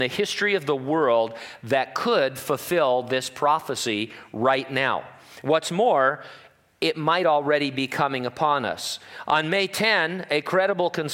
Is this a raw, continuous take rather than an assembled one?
yes; 0 cuts

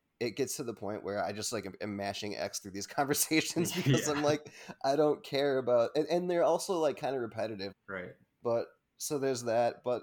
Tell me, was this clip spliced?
yes; 1 cut; at 7.7 s

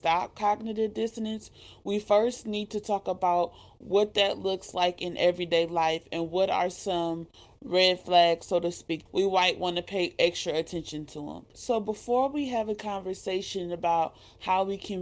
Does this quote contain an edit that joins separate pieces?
yes; 2 cuts; at 9.1 s, 11.5 s

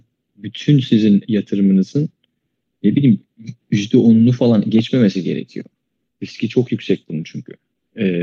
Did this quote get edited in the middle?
yes; 1 cut; at 6.1 s

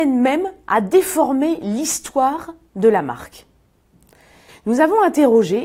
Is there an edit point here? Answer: yes; 1 cut; at 4.5 s

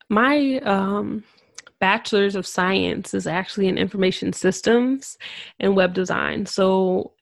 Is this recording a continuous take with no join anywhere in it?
yes; 0 cuts

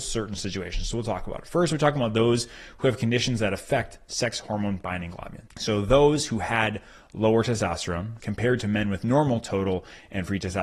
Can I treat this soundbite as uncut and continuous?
no; 2 cuts; at 5.5 s, 8.2 s

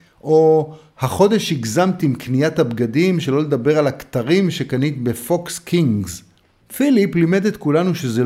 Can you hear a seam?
yes; 1 cut; at 6.6 s

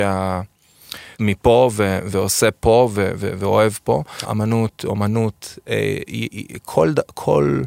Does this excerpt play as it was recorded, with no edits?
no; 2 cuts; at 1.1 s, 4.2 s

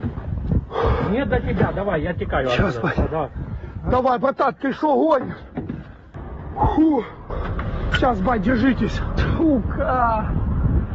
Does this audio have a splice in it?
no; 0 cuts

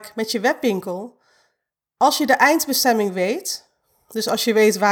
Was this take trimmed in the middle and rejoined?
no; 0 cuts

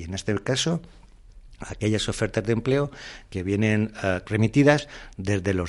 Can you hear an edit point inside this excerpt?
yes; 1 cut; at 4.2 s

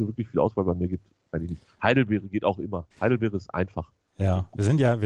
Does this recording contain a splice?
yes; 1 cut; at 2.9 s

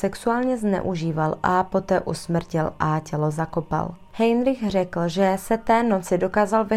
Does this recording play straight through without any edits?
yes; 0 cuts

